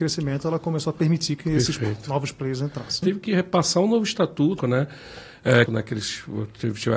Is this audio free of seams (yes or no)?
no